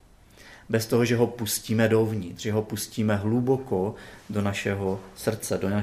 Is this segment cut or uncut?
uncut